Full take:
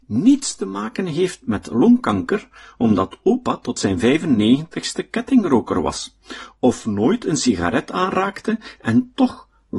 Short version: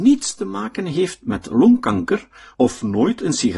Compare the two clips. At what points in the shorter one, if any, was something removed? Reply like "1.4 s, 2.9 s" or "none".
2.5 s